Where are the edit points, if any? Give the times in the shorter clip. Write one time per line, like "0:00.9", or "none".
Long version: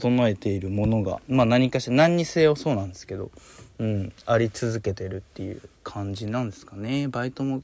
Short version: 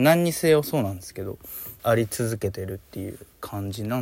0:01.8